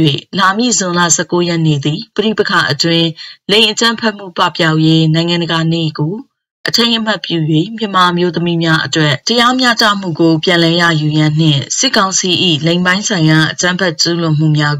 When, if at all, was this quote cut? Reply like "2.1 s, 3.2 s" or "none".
none